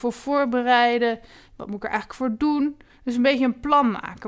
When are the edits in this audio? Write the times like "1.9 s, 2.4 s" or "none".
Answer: none